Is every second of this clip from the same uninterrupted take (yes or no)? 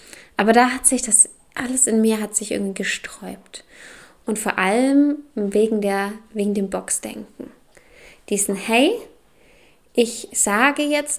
yes